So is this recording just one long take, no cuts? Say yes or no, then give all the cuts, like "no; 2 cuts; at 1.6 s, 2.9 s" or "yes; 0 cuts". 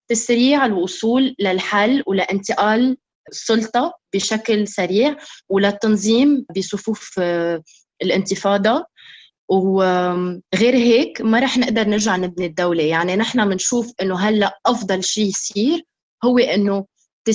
no; 1 cut; at 10.4 s